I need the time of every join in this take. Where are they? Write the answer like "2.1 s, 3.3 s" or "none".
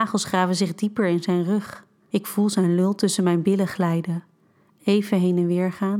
2.1 s